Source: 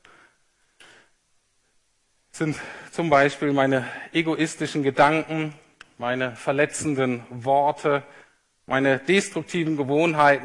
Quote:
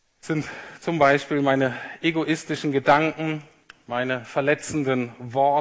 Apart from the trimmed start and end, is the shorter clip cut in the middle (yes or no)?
no